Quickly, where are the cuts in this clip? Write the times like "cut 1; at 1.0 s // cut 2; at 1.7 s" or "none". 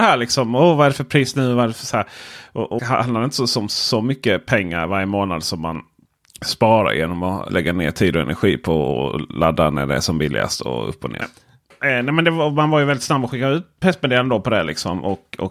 cut 1; at 2.8 s // cut 2; at 7.5 s // cut 3; at 11.2 s